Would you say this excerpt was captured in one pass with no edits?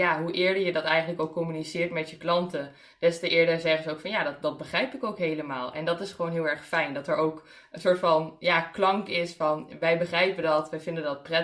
yes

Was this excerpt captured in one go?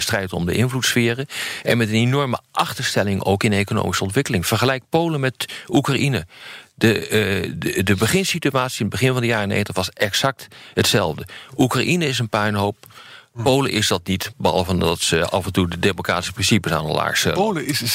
yes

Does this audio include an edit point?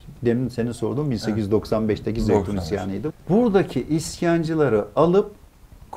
yes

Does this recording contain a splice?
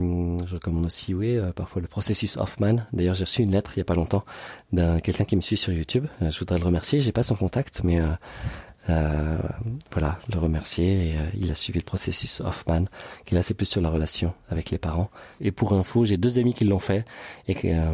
yes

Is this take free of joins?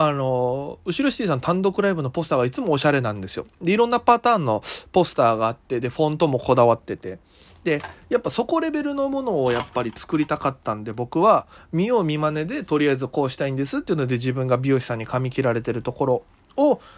yes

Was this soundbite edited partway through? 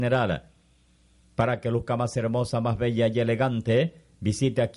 no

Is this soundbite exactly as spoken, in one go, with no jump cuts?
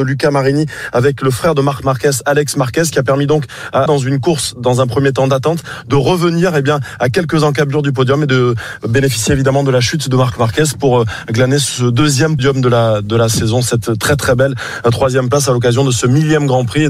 no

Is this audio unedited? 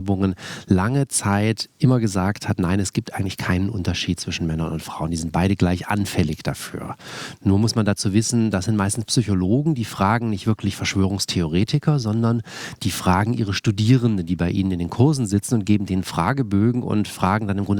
yes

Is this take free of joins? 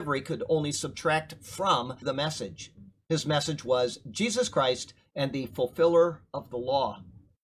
no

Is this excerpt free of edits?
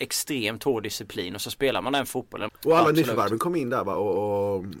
no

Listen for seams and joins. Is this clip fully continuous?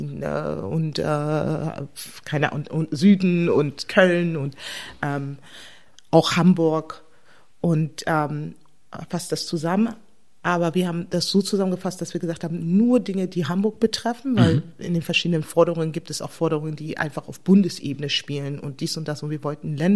yes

